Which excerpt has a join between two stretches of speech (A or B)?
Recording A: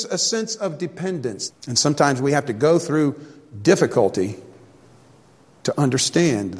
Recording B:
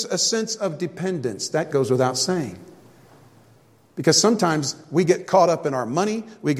A